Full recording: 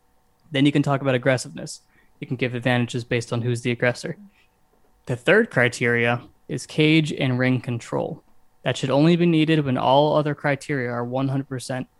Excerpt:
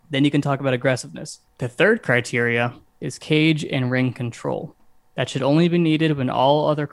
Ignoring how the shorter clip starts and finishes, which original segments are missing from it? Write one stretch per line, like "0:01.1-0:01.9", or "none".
0:01.9-0:05.0

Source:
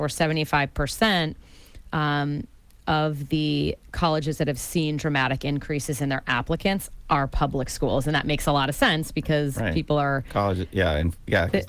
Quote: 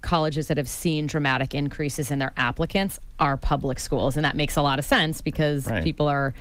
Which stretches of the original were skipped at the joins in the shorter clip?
none

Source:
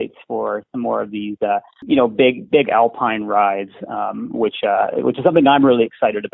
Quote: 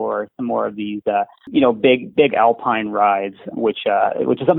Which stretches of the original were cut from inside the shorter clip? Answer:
0:03.9-0:04.3

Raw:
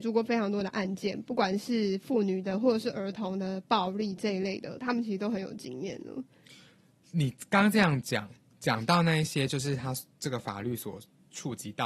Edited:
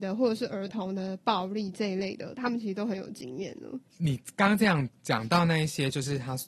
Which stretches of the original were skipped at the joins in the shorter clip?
0:06.3-0:07.0
0:08.0-0:08.5

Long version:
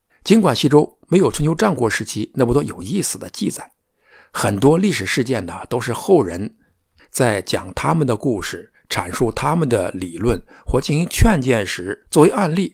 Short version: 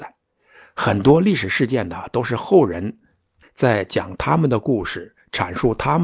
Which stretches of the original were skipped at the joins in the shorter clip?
none

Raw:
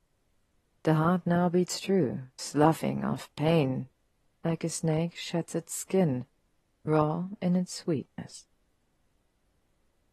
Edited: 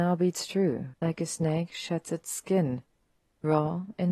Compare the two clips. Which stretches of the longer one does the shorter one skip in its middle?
0:02.3-0:04.4

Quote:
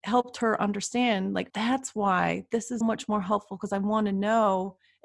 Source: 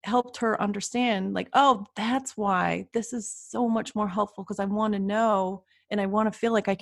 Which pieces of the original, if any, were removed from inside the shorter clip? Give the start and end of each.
0:01.5-0:01.9
0:03.2-0:03.7

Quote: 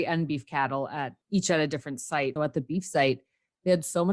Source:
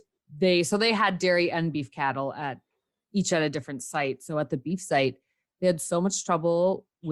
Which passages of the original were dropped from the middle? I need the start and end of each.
0:02.7-0:03.0
0:04.2-0:04.3

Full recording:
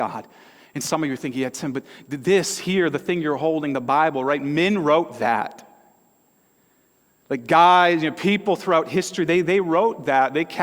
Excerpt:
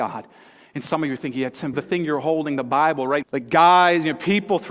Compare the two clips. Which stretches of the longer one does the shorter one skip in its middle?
0:01.7-0:02.9
0:04.4-0:07.2

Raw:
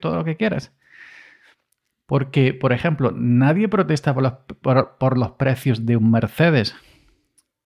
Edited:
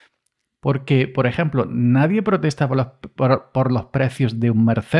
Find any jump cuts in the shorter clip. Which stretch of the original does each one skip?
none

